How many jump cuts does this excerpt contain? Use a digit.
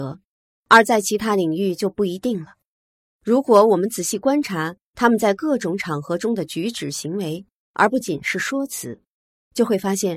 1